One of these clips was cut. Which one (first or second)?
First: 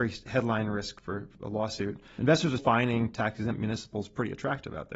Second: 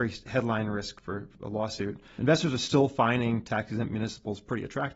first